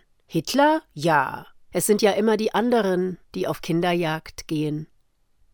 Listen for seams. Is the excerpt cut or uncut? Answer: cut